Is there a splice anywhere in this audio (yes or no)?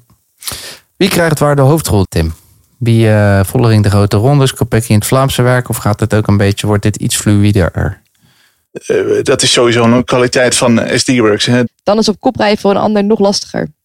yes